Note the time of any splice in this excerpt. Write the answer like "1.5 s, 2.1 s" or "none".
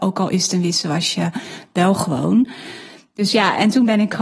none

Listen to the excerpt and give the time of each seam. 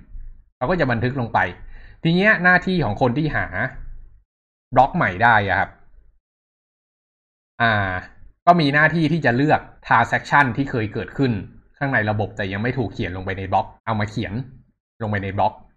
9.8 s, 13.8 s

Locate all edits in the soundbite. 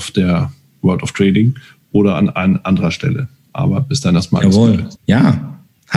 5.0 s

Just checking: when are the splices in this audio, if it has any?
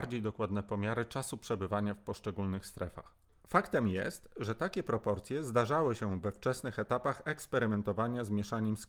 3.4 s

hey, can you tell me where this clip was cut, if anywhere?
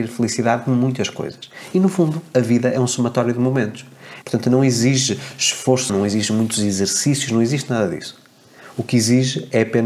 4.2 s, 5.9 s

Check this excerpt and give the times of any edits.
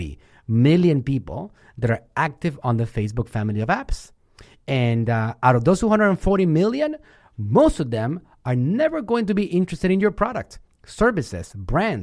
none

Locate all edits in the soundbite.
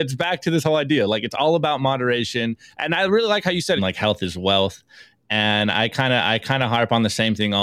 3.8 s

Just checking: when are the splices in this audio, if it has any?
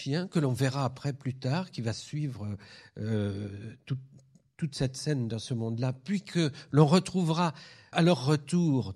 7.9 s

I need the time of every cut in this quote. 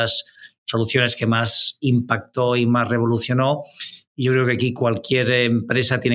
none

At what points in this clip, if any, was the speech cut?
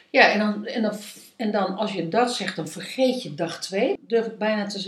4.0 s

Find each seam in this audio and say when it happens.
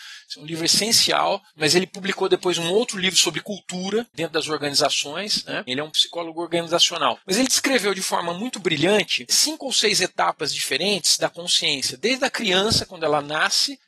5.7 s

